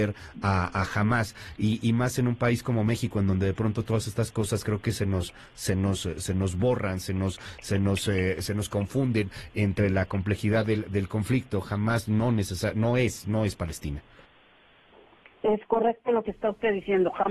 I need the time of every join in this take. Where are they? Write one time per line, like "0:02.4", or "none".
none